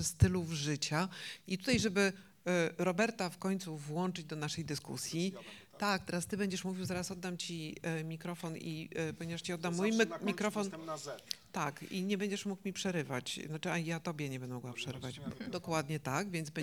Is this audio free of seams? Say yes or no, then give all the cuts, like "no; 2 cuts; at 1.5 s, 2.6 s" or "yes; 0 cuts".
yes; 0 cuts